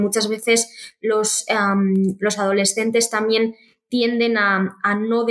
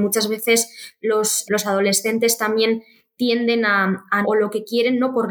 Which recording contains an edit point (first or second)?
second